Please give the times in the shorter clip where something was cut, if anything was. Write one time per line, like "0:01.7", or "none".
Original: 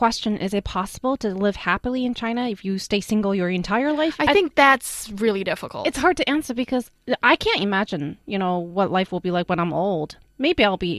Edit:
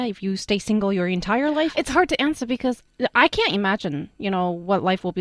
0:01.7

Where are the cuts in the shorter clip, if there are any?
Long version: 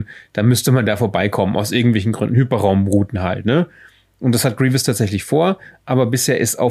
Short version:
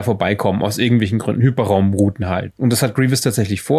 0:02.5

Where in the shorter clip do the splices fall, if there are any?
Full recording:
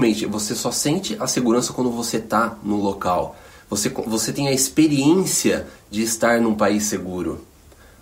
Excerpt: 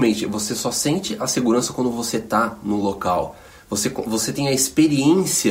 none

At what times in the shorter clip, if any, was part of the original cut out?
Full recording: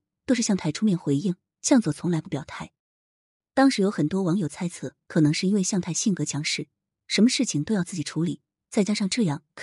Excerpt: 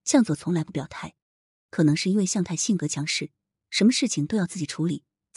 0:01.7

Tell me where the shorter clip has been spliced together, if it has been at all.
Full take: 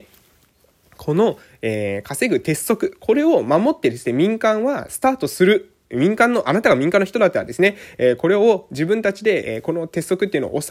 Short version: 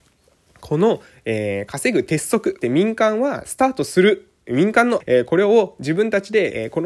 0:02.6
0:05.0

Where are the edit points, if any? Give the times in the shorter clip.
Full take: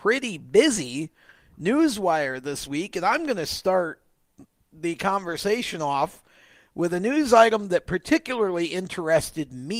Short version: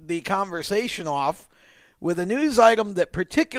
none

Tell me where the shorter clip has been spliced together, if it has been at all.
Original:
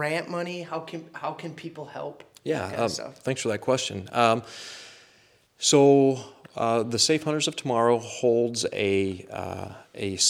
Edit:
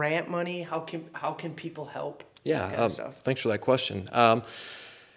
none

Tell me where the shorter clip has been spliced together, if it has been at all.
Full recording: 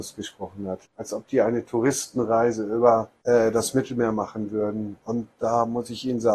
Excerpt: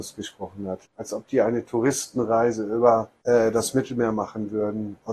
none

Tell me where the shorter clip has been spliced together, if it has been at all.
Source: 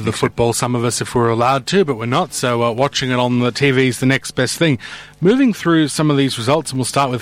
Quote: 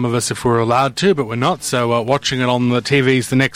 none

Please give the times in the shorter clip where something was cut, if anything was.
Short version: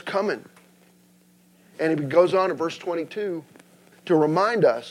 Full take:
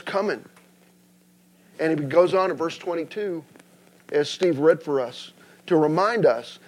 0:03.9

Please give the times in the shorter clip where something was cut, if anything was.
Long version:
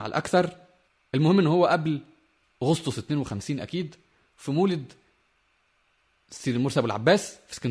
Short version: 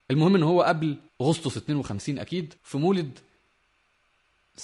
0:01.1
0:02.6

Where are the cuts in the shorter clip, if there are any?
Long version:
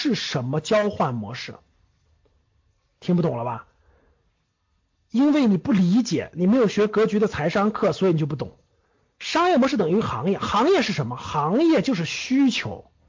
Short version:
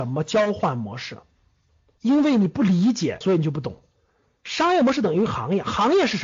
0:02.0
0:03.2

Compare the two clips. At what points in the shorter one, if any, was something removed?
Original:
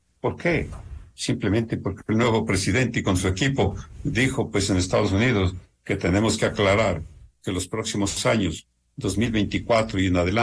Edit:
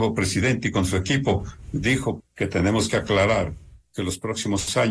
0:02.2

